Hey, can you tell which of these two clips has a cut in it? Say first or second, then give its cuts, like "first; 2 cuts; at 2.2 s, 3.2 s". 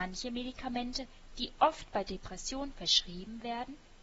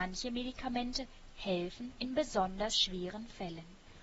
second; 1 cut; at 1.3 s